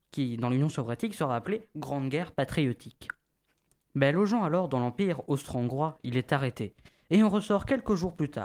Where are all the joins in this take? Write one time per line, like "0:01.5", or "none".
none